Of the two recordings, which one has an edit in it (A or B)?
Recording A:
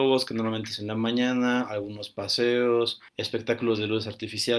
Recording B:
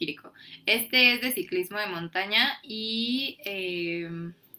A